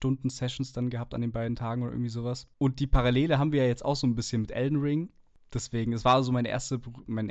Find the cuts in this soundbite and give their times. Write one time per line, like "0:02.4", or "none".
0:02.5